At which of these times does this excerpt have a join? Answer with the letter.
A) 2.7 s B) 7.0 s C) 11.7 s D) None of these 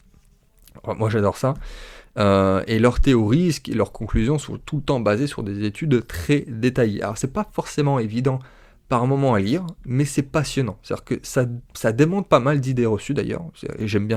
C